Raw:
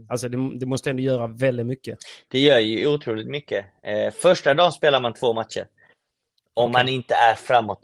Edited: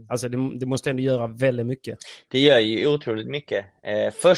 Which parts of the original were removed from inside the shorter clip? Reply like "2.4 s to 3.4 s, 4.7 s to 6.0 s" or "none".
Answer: none